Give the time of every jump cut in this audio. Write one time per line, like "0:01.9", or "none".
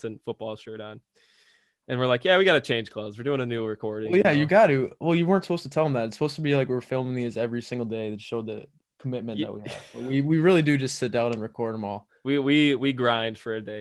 none